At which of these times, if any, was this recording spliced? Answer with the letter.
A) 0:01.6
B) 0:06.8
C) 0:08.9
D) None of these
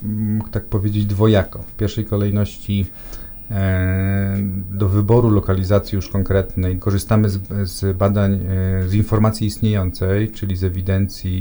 B